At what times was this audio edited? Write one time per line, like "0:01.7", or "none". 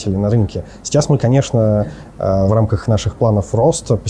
0:02.5